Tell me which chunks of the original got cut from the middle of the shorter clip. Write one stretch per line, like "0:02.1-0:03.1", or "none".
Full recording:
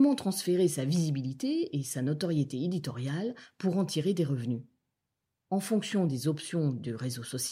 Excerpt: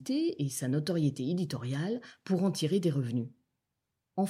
none